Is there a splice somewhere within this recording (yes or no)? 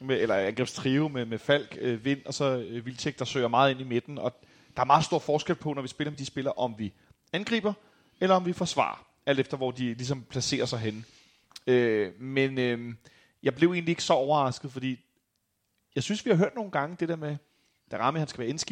no